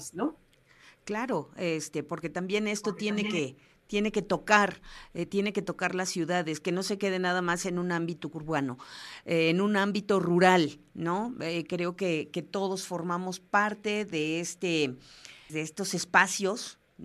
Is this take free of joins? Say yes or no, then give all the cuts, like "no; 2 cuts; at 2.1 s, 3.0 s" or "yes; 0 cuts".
no; 1 cut; at 15.5 s